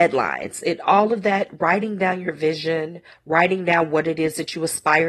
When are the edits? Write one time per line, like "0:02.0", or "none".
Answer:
none

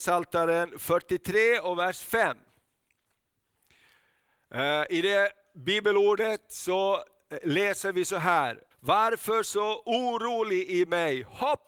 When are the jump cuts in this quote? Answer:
0:08.7

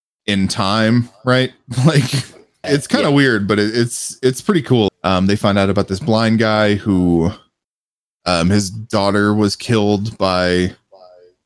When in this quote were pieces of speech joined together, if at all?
0:02.6
0:04.9

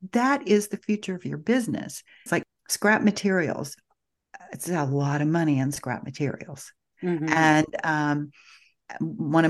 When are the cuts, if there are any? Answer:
0:02.3

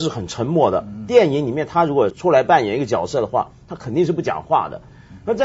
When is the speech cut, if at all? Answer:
0:02.1

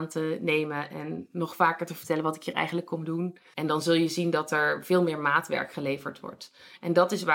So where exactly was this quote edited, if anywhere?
0:03.5

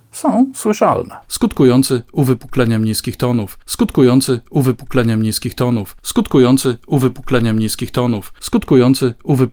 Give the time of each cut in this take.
none

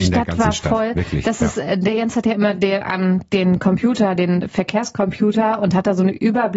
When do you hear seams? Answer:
none

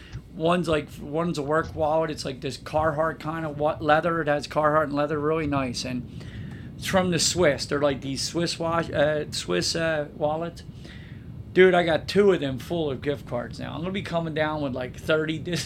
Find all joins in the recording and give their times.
none

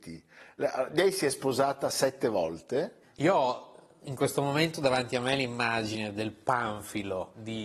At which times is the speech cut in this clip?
none

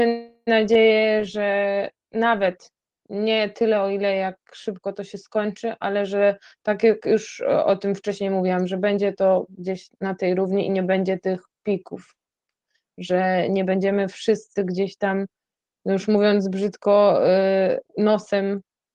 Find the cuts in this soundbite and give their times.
none

